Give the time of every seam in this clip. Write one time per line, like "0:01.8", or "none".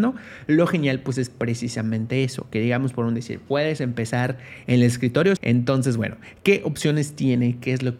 0:05.4